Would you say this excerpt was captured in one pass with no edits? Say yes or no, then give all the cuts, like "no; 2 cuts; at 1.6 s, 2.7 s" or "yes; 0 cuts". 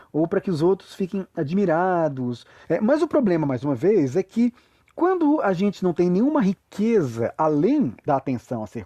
no; 1 cut; at 2.6 s